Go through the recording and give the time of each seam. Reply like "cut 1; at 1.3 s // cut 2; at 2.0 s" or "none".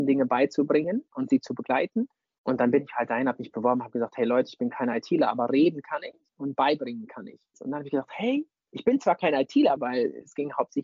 cut 1; at 7.5 s // cut 2; at 9.8 s